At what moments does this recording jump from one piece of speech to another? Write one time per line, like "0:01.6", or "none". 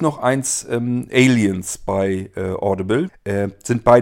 0:03.1